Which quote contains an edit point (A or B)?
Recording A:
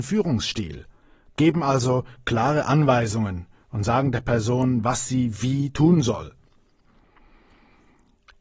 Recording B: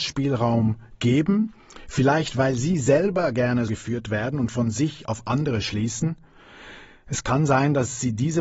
B